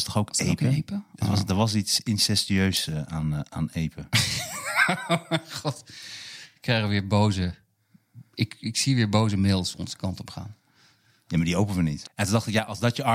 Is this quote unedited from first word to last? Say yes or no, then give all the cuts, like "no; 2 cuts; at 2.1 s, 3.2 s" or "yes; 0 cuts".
no; 1 cut; at 12.0 s